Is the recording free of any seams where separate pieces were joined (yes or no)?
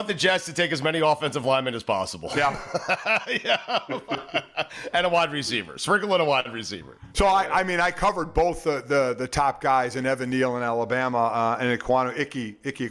yes